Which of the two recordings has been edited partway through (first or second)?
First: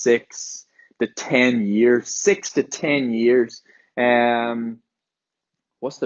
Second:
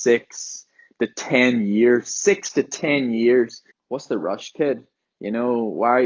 second